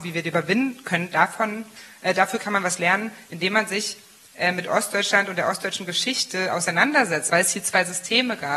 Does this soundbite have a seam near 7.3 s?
yes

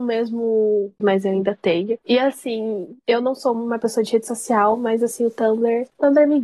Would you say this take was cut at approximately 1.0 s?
yes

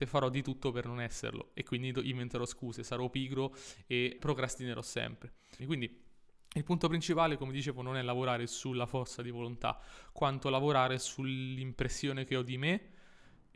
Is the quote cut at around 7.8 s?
no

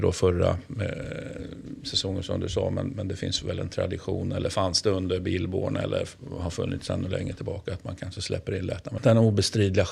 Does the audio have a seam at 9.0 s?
yes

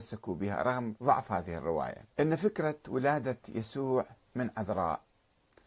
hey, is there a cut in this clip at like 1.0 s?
yes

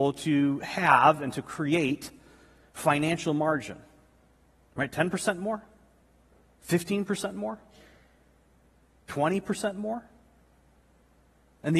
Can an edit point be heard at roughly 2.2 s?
no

